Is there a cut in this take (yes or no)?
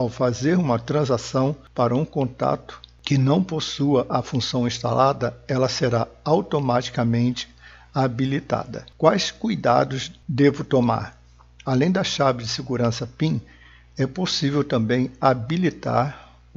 no